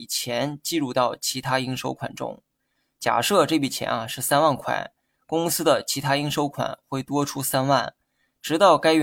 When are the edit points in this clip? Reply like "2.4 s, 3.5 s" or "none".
none